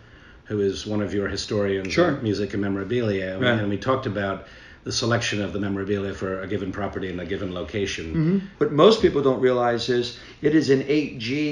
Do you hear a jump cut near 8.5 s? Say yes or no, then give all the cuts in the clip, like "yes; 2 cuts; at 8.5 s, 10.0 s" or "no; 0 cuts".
yes; 1 cut; at 8.5 s